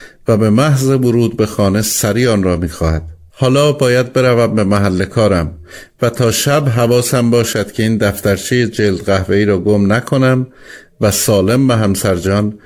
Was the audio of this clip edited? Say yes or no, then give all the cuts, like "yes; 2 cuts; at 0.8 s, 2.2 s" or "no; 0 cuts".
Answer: yes; 1 cut; at 3.3 s